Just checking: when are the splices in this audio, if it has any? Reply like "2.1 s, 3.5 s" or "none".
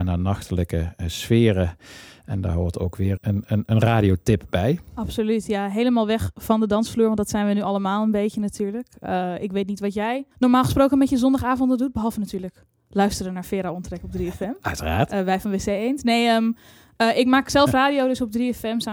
3.2 s, 10.3 s